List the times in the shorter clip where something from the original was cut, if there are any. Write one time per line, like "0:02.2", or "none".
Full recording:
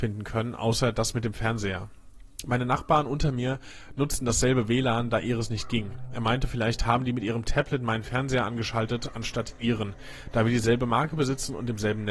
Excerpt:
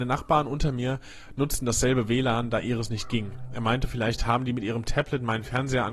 none